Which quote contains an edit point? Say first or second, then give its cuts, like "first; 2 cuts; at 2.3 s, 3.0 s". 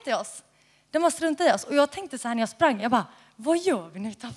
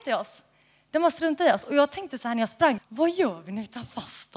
second; 1 cut; at 2.8 s